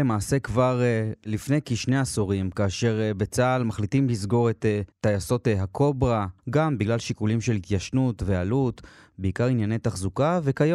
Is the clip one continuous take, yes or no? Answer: no